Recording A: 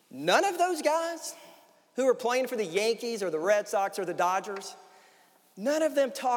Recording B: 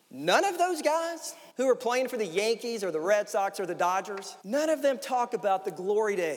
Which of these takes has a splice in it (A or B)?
B